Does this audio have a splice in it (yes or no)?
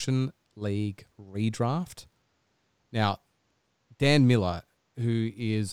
no